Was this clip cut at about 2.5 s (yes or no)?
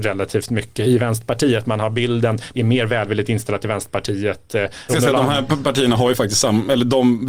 yes